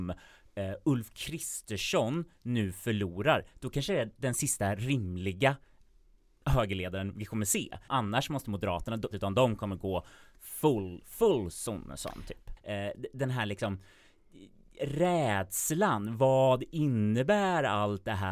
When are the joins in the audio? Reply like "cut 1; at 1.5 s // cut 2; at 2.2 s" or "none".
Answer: cut 1; at 7.9 s // cut 2; at 9.1 s // cut 3; at 12.6 s